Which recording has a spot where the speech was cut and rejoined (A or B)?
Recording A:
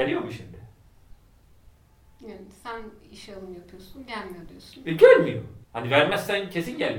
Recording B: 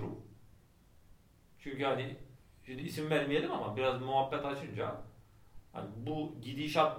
A